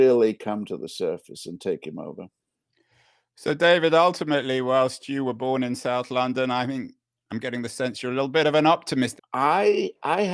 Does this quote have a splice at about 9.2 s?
yes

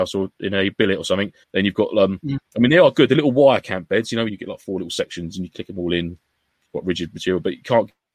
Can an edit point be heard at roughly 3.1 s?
no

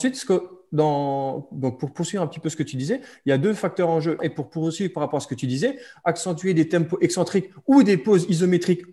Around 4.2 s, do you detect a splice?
yes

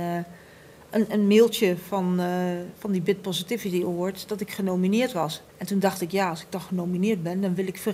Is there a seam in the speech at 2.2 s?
no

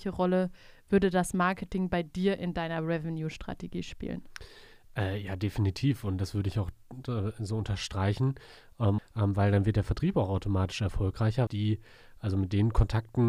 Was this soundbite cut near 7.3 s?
no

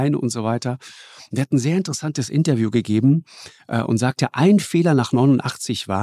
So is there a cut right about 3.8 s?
no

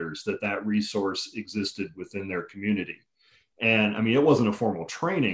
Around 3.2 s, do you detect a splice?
no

